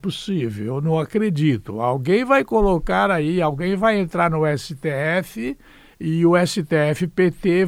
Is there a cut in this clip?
no; 0 cuts

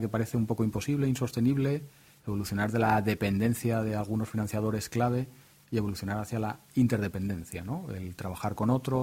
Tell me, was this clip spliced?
no; 0 cuts

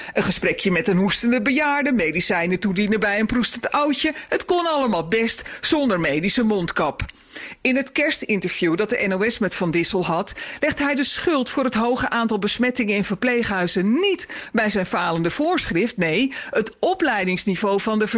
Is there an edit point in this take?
no; 0 cuts

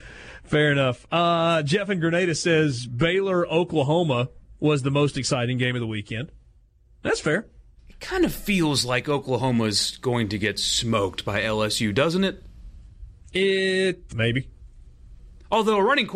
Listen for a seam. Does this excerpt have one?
yes; 1 cut; at 14.1 s

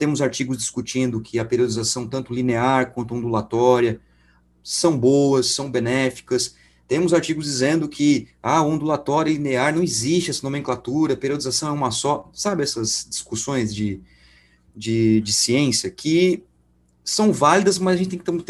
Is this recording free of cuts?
yes; 0 cuts

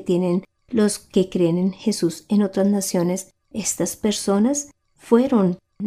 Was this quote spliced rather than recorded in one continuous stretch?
yes; 1 cut; at 3.5 s

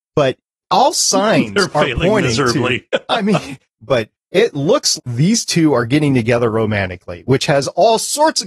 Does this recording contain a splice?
yes; 2 cuts; at 3.8 s, 5.0 s

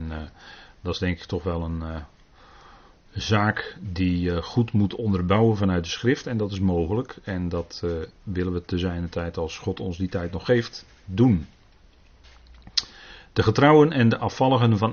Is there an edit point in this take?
no; 0 cuts

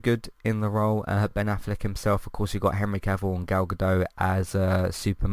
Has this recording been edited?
no; 0 cuts

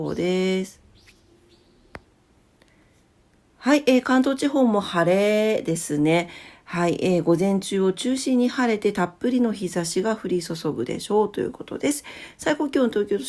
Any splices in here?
no; 0 cuts

